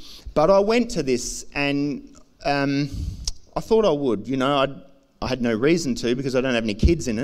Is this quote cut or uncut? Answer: uncut